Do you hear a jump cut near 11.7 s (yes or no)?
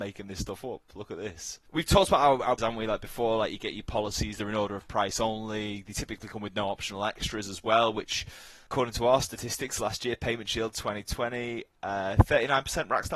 no